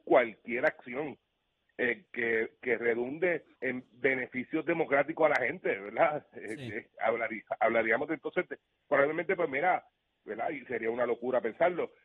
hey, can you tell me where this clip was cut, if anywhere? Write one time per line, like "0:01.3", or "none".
0:03.5